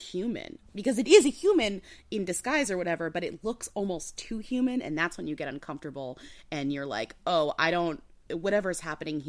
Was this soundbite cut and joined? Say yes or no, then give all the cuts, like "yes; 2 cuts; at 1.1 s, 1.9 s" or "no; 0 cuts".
no; 0 cuts